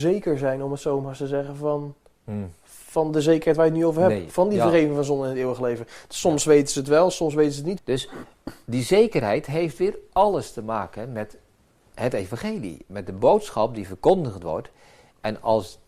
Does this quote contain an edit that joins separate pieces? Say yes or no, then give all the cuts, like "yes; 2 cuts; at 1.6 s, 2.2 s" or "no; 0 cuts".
yes; 1 cut; at 7.8 s